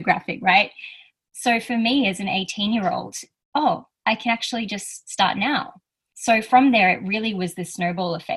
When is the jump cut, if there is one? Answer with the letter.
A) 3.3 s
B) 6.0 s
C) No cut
A